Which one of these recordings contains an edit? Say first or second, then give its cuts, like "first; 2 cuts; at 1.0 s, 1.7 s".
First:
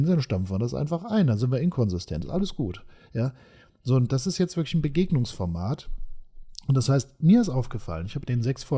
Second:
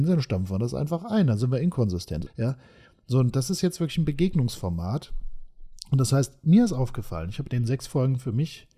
second; 1 cut; at 2.3 s